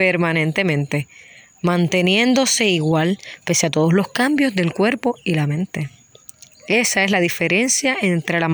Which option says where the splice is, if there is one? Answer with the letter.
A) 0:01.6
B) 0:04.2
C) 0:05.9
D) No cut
D